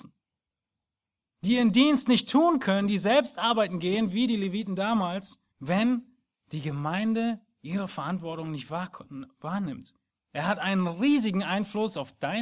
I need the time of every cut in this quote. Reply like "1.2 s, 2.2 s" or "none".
5.5 s, 10.1 s

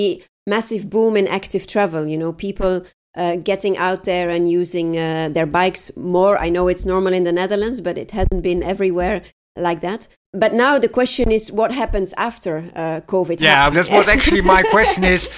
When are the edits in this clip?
10.3 s, 13.7 s

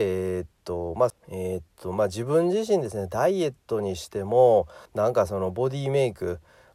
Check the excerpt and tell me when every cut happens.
1.1 s, 4.9 s

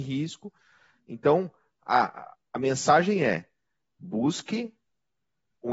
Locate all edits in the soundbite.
none

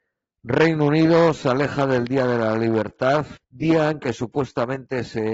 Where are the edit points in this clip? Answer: 3.4 s

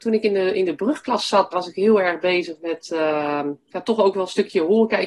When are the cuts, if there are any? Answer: 1.5 s

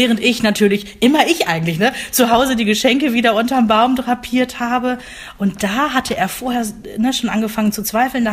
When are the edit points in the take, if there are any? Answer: none

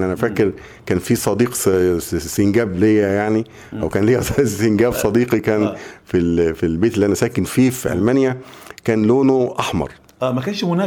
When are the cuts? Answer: none

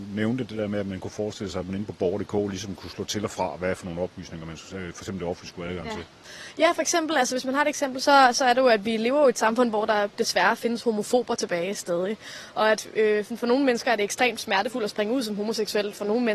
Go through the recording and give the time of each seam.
none

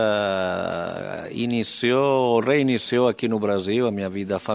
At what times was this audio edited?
none

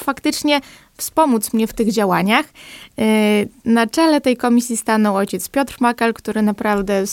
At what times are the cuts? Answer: none

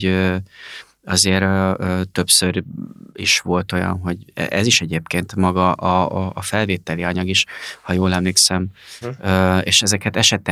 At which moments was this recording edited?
3.1 s, 9.0 s

